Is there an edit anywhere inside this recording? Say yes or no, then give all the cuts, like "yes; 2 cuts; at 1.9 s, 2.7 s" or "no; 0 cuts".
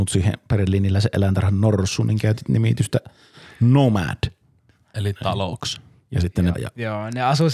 yes; 2 cuts; at 4.8 s, 6.5 s